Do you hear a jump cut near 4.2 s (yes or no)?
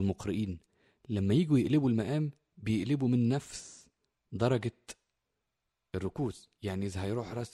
no